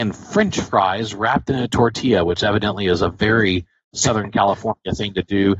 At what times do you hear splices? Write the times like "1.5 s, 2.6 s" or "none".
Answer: none